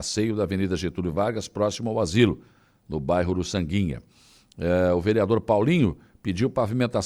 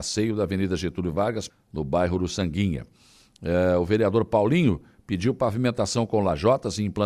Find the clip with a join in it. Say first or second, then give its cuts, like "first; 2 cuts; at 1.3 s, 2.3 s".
second; 1 cut; at 1.5 s